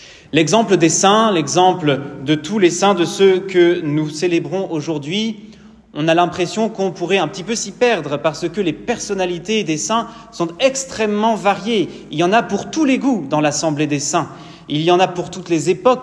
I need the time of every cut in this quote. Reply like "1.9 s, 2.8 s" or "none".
none

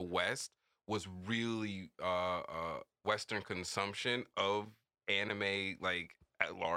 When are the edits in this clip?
3.0 s

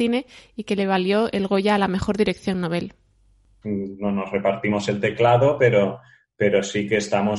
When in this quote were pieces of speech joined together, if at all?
3.6 s

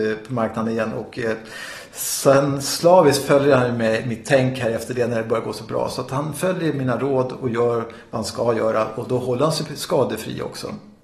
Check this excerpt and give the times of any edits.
none

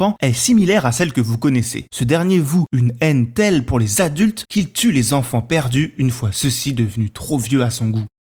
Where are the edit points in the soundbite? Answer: 1.9 s

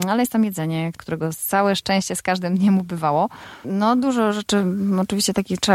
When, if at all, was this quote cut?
3.6 s

